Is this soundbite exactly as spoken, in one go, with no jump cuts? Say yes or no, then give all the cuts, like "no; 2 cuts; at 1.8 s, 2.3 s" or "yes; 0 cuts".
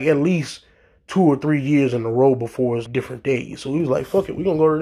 no; 1 cut; at 2.9 s